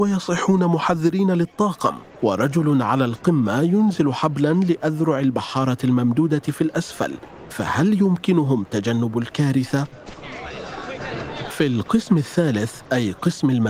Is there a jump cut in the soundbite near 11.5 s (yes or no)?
no